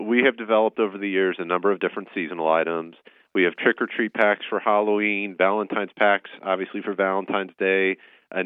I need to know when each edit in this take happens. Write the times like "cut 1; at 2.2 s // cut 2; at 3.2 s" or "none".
none